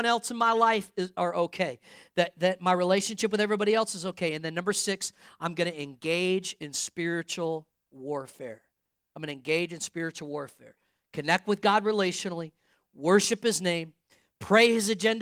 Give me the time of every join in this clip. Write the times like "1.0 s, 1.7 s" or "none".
none